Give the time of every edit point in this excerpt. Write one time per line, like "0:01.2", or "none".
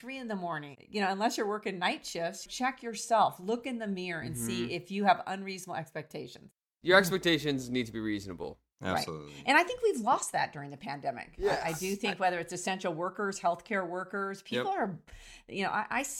none